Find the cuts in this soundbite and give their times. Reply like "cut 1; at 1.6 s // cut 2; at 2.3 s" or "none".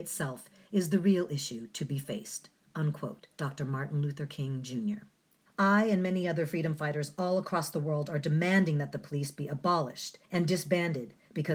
cut 1; at 3.3 s // cut 2; at 5.5 s // cut 3; at 10.2 s